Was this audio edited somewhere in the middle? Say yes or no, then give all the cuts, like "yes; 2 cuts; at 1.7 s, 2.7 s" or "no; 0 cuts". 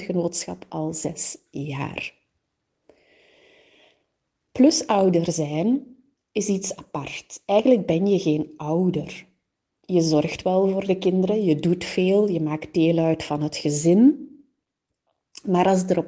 no; 0 cuts